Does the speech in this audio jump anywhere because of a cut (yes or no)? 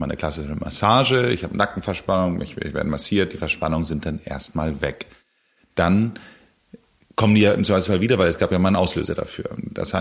no